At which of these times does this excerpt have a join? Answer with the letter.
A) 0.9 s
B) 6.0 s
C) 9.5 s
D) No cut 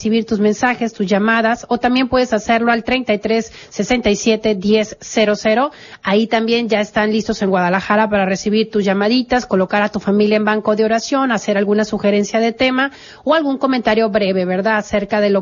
D